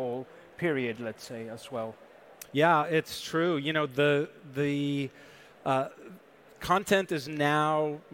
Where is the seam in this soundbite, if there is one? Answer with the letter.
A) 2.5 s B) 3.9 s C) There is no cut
A